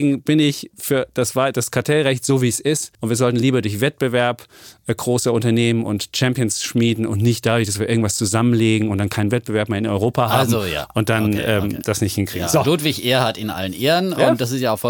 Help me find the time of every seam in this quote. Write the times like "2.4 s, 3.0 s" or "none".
2.9 s